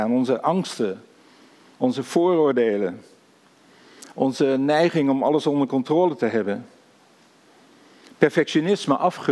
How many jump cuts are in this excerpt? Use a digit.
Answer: 1